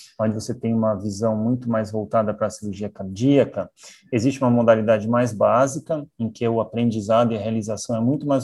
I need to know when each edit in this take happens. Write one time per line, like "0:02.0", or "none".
none